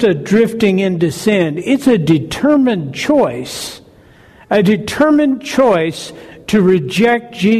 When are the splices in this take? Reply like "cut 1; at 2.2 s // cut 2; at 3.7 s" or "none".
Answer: none